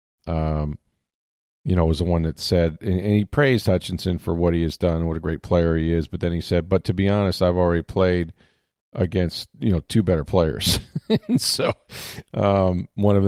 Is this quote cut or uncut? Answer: uncut